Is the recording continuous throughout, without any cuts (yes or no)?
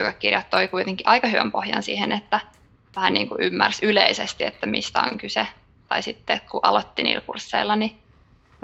yes